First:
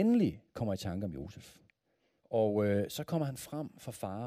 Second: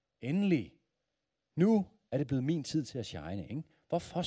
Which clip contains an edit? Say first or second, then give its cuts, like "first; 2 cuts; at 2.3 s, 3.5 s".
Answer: first; 1 cut; at 2.2 s